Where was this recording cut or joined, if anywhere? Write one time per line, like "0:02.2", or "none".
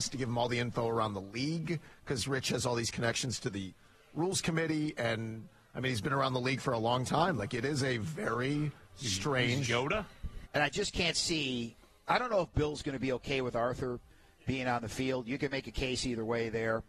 0:10.4